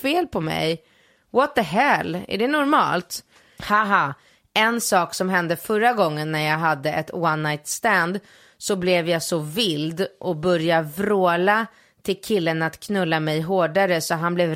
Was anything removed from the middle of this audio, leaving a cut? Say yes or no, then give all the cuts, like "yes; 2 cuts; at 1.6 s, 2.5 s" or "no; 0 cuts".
yes; 1 cut; at 3.6 s